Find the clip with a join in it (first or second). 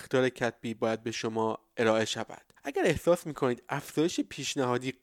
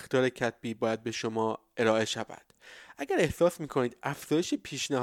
first